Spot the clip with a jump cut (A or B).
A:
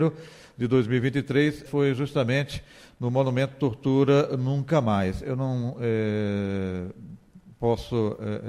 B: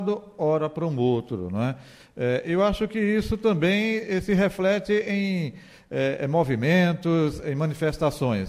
A